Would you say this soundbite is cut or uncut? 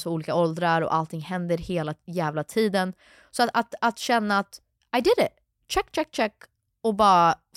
uncut